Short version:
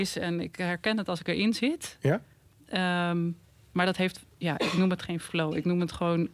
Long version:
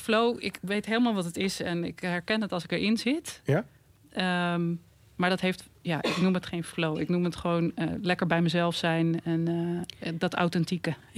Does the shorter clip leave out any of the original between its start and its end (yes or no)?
no